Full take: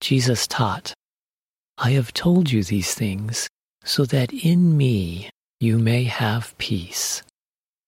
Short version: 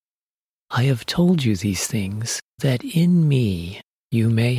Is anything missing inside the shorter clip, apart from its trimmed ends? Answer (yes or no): yes